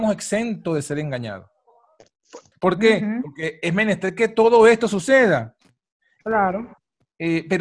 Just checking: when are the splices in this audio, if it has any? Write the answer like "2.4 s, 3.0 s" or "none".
2.5 s